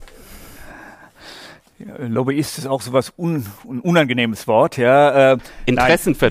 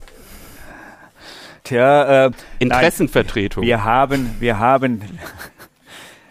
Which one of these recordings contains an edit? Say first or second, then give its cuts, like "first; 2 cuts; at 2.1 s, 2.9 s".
second; 1 cut; at 1.6 s